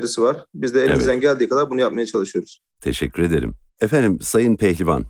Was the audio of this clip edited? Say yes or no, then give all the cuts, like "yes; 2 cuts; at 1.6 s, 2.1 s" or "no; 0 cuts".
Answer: no; 0 cuts